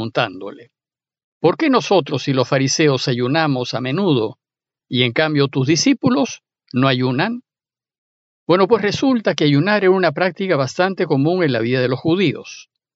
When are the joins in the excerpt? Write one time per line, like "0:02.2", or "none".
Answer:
none